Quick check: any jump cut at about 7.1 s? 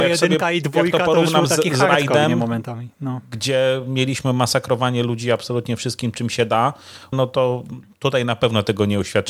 yes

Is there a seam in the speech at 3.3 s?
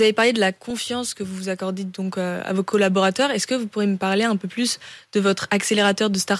no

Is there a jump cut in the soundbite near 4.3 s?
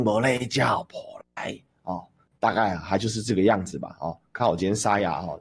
no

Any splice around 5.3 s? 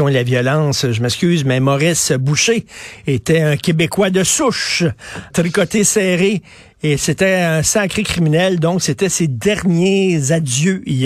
yes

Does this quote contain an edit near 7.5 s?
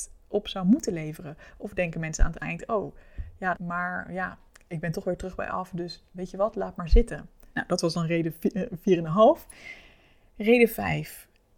yes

